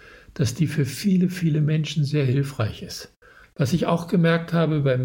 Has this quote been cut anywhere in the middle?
yes; 1 cut; at 3.4 s

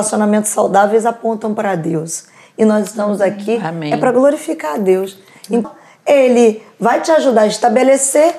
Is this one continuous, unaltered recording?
no; 1 cut; at 5.6 s

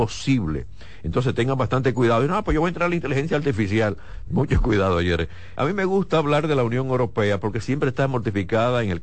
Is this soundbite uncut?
no; 2 cuts; at 4.3 s, 5.6 s

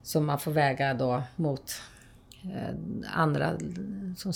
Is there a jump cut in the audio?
no; 0 cuts

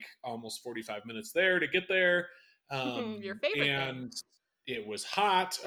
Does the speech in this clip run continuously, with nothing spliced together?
yes; 0 cuts

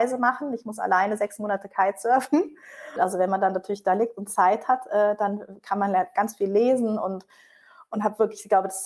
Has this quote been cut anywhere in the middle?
yes; 1 cut; at 3.0 s

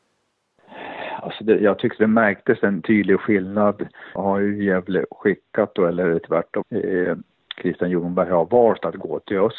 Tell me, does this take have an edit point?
yes; 2 cuts; at 4.2 s, 6.6 s

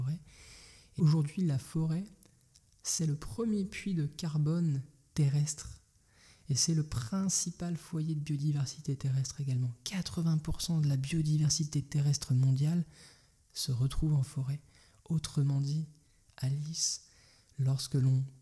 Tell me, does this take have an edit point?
yes; 1 cut; at 1.0 s

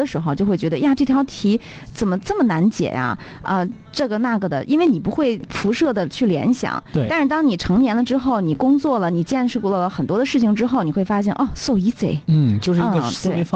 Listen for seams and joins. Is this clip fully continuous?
yes; 0 cuts

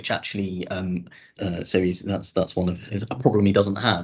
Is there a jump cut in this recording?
yes; 2 cuts; at 1.4 s, 2.9 s

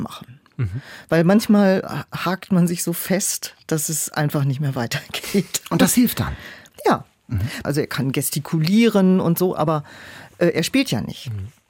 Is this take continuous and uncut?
no; 1 cut; at 7.6 s

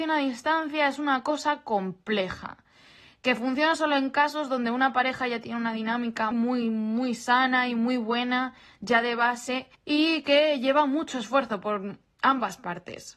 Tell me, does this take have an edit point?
yes; 1 cut; at 6.3 s

